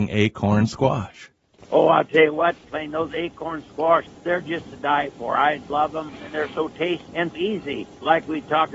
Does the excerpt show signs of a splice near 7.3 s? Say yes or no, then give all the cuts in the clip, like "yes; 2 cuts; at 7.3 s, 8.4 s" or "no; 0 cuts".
yes; 1 cut; at 7.3 s